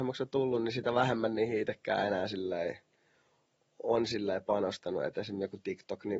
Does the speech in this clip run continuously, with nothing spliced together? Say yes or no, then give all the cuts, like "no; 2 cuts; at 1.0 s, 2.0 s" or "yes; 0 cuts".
yes; 0 cuts